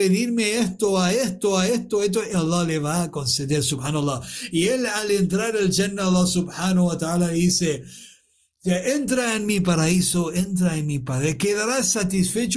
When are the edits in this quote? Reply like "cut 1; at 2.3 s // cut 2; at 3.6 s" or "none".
none

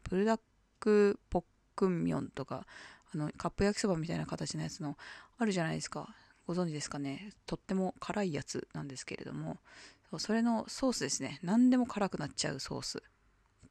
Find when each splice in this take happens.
cut 1; at 3.3 s

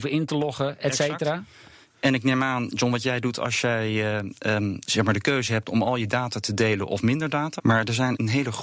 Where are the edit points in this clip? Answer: cut 1; at 4.9 s // cut 2; at 7.6 s

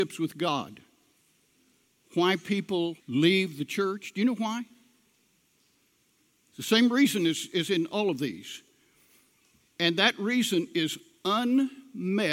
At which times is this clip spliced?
cut 1; at 3.0 s

